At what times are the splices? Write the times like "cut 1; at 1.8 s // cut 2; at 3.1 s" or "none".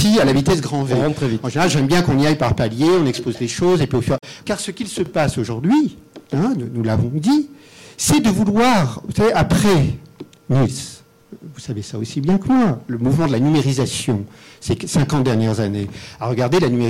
cut 1; at 4.4 s